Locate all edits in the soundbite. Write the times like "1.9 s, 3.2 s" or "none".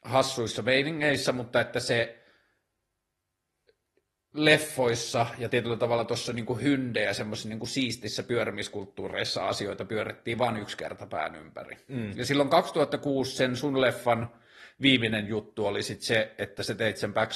none